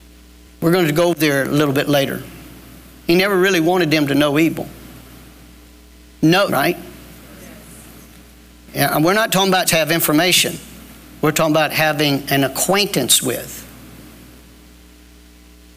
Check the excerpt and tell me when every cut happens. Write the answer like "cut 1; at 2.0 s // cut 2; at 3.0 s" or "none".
cut 1; at 6.5 s // cut 2; at 9.7 s